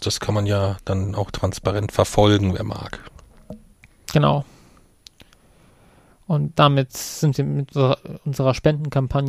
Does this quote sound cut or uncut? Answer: cut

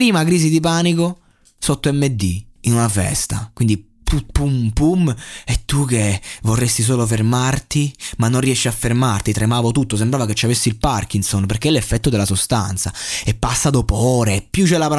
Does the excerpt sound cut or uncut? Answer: cut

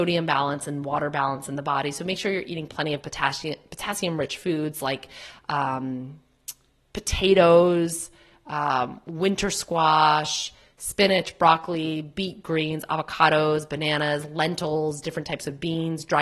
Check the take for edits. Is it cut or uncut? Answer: uncut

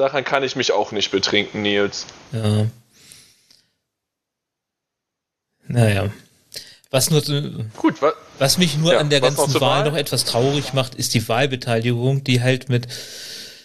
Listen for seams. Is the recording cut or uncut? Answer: uncut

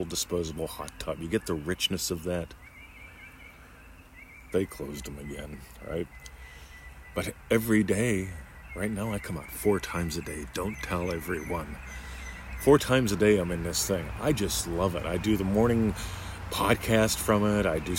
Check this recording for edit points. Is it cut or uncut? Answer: cut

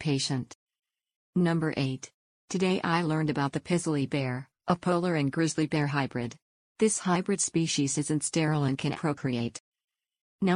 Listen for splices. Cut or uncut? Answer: cut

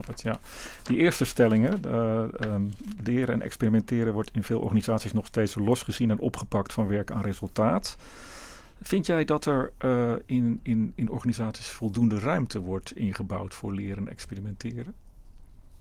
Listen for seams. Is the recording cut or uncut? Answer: uncut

